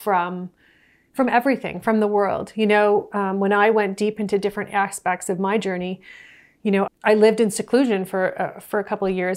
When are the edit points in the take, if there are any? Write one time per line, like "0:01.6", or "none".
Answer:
0:06.9